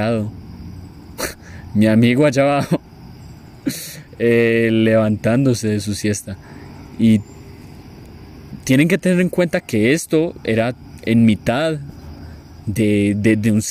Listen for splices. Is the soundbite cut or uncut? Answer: uncut